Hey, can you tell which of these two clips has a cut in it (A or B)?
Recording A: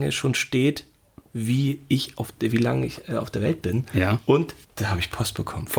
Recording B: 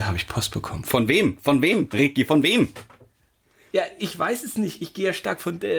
A